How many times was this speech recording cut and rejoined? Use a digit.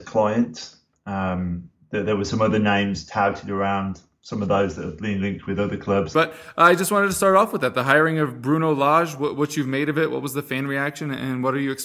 1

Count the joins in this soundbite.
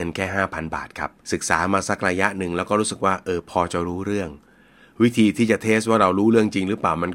1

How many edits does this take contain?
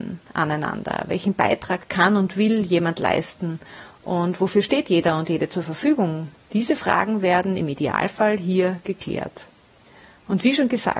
1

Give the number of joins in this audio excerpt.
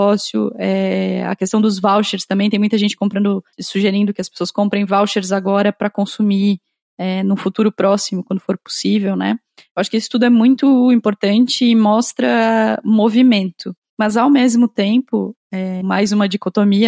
1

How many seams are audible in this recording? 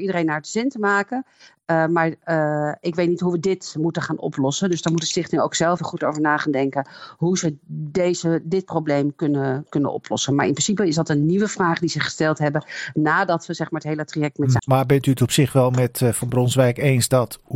2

